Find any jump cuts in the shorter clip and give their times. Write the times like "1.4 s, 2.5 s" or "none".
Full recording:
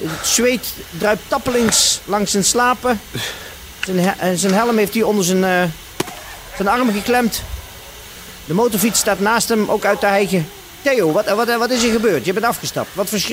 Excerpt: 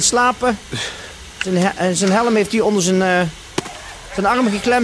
none